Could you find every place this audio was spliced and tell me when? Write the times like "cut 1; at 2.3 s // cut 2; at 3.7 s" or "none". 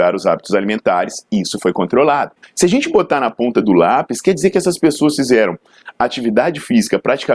cut 1; at 2.4 s